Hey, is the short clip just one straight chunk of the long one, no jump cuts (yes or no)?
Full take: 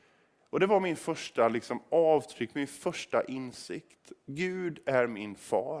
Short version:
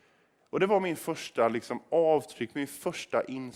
yes